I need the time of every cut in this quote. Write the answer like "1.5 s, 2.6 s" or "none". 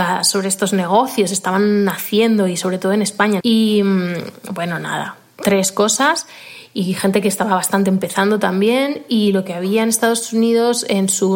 3.4 s

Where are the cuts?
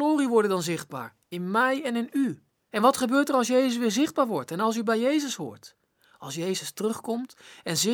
2.7 s

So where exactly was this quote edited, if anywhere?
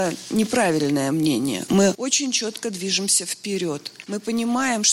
4.0 s

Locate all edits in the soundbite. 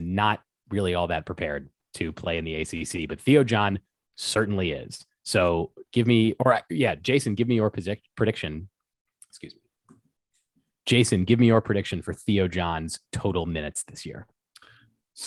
5.8 s

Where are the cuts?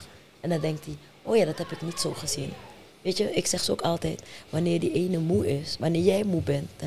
none

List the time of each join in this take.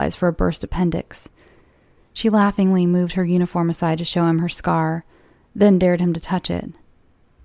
none

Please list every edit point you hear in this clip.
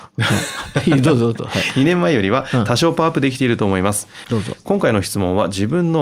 4.2 s

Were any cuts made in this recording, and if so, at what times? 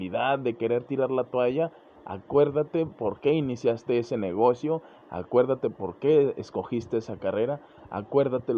none

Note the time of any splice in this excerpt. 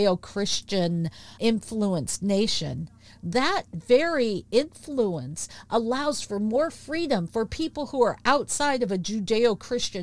none

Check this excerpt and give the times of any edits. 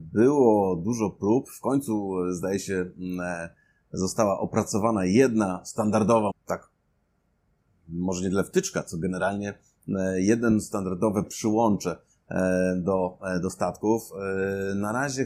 6.3 s

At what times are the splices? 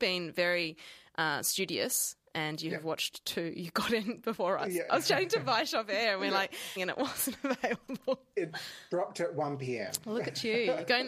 6.8 s

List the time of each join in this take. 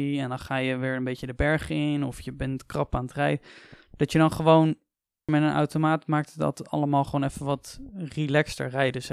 5.3 s

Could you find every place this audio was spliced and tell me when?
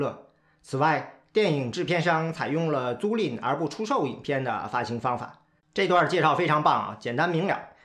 5.6 s

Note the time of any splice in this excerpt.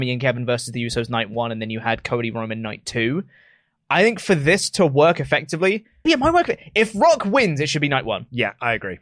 6.0 s

